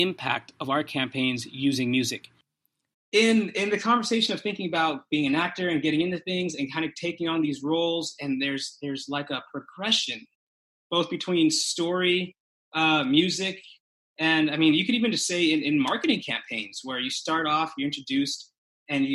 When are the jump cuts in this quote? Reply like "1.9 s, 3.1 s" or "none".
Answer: 2.9 s